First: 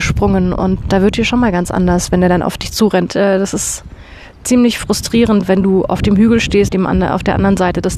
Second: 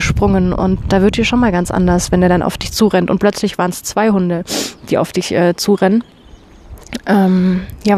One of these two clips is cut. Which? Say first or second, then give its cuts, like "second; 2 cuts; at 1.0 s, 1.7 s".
first; 2 cuts; at 3.1 s, 6.7 s